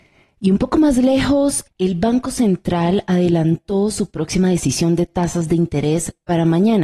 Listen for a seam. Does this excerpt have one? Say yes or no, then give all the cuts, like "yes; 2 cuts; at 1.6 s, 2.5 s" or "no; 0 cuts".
yes; 1 cut; at 1.7 s